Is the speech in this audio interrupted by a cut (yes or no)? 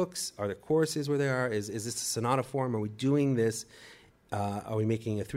no